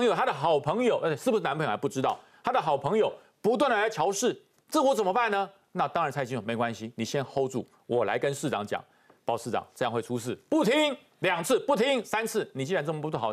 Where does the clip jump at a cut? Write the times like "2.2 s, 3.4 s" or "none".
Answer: none

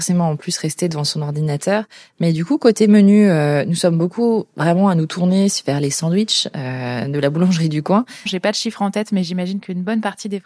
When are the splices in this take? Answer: 8.3 s

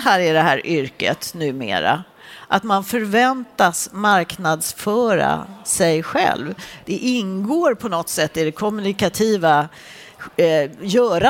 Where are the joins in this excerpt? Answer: 6.8 s

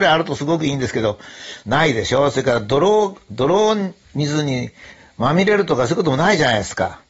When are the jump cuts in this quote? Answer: 1.6 s

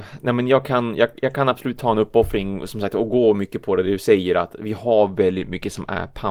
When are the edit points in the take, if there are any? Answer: none

